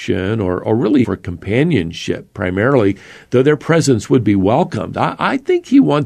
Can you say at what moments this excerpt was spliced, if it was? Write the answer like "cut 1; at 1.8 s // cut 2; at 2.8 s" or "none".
cut 1; at 1.0 s